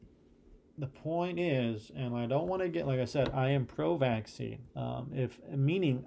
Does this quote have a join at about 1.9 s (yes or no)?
no